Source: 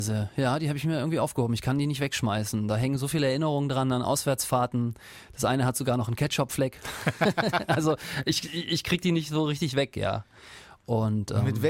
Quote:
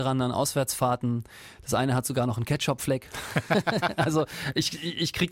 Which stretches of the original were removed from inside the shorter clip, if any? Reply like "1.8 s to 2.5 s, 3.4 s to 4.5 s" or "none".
none